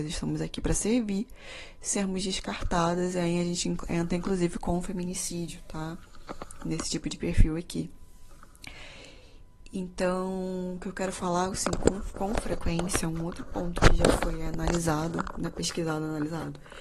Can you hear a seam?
no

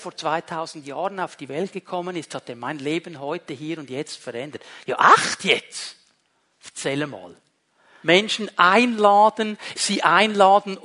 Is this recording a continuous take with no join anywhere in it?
no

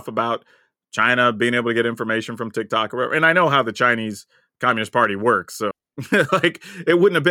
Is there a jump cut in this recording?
yes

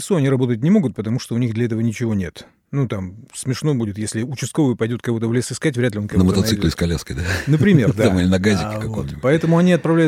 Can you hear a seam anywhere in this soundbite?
no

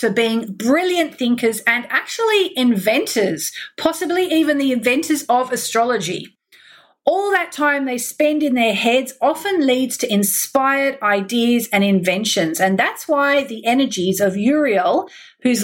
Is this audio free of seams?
yes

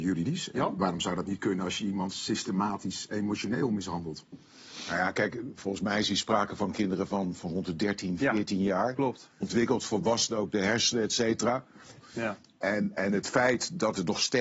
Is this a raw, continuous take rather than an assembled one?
no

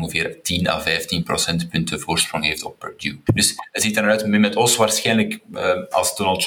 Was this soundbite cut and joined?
yes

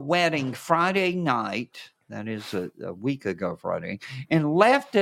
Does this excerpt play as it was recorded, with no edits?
yes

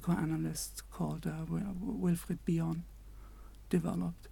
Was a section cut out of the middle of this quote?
no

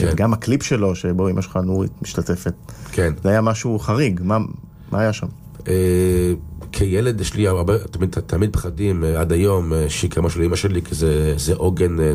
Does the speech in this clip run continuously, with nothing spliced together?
yes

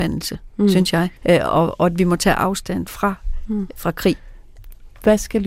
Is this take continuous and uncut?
no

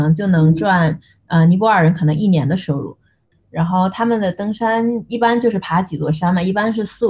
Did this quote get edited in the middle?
yes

